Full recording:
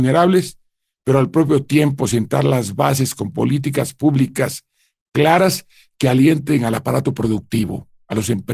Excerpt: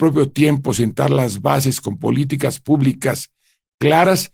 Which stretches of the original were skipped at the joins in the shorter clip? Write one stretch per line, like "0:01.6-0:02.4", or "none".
none